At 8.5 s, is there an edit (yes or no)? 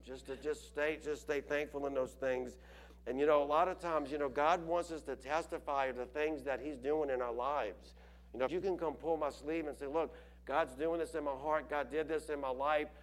yes